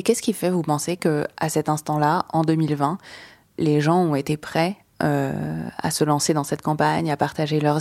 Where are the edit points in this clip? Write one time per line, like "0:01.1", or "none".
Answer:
none